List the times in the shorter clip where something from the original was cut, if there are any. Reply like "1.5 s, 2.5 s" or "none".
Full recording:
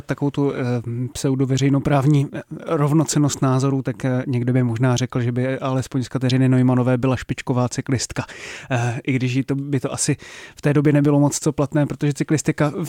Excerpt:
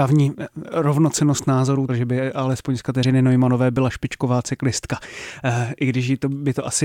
1.9 s